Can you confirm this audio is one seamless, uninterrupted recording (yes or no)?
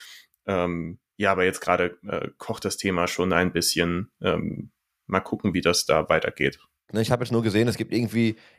no